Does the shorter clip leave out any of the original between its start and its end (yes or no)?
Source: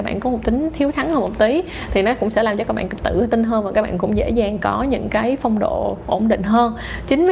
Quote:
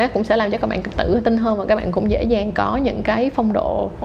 no